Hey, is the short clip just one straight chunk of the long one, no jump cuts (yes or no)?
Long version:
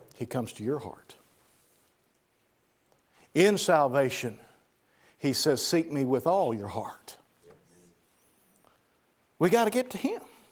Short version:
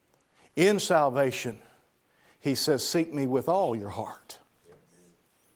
yes